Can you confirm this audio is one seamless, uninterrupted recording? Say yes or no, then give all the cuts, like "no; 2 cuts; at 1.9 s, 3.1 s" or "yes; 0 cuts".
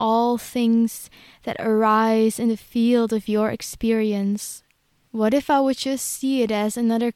no; 1 cut; at 5.0 s